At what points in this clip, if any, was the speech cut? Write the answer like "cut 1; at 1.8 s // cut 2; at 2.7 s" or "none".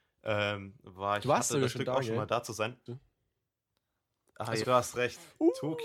cut 1; at 2.9 s // cut 2; at 4.6 s